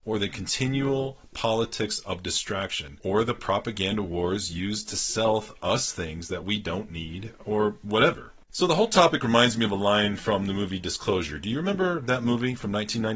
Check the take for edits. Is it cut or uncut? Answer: cut